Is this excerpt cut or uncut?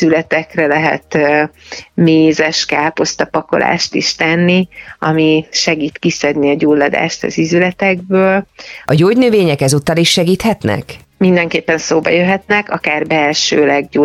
cut